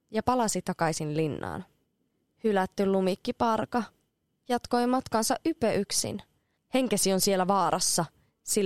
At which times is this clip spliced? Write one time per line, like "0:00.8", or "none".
0:06.6